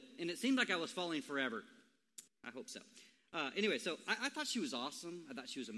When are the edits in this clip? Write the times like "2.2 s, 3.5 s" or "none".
2.3 s